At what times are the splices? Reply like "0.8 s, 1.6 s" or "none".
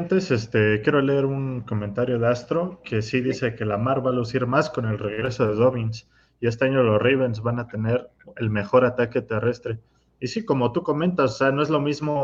none